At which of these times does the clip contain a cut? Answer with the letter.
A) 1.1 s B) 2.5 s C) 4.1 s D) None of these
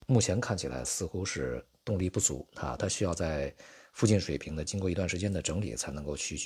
D